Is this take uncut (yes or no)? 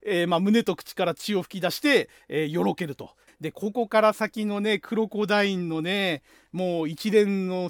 no